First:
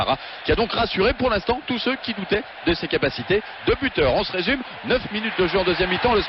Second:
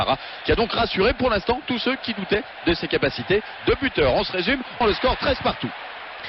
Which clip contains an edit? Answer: second; 1 cut; at 4.8 s

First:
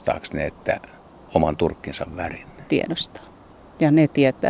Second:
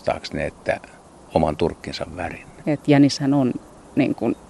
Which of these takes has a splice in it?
second; 1 cut; at 2.6 s

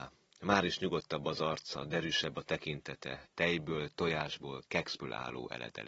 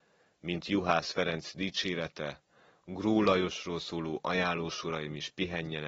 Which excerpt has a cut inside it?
first; 1 cut; at 3.3 s

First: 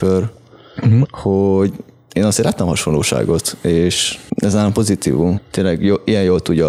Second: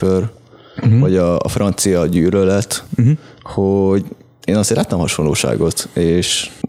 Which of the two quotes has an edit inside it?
first; 2 cuts; at 1.0 s, 5.3 s

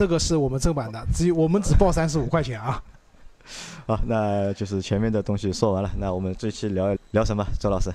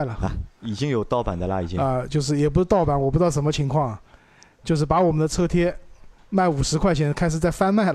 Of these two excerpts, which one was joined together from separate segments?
first; 1 cut; at 7.0 s

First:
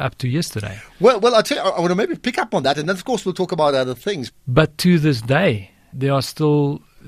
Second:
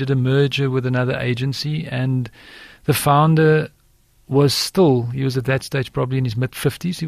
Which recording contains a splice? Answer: first; 2 cuts; at 4.3 s, 5.9 s

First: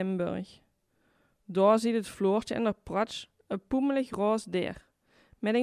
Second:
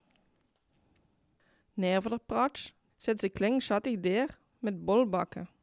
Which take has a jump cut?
second; 1 cut; at 2.9 s

